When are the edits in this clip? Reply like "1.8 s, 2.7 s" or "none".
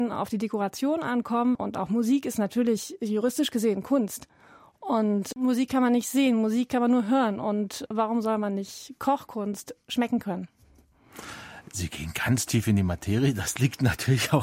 1.5 s